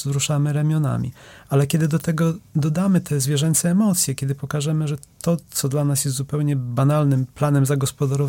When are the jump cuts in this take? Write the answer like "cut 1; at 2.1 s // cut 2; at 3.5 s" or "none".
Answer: none